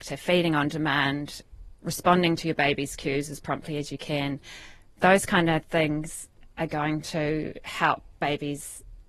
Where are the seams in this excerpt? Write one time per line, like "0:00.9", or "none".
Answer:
none